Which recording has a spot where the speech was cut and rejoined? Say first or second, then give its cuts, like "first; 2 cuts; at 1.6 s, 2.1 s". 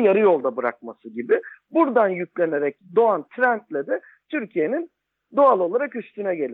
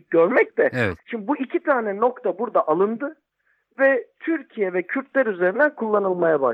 second; 1 cut; at 1.0 s